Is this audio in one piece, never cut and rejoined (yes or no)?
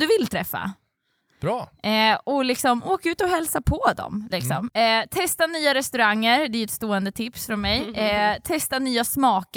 no